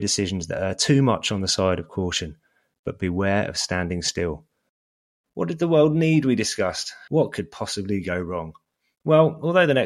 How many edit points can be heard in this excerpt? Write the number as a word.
two